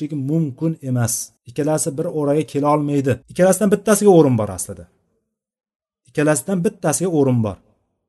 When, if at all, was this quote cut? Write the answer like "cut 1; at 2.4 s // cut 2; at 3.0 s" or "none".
cut 1; at 1.4 s // cut 2; at 3.2 s